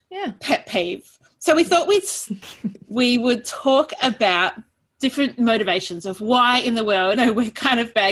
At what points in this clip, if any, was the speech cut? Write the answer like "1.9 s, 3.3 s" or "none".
7.1 s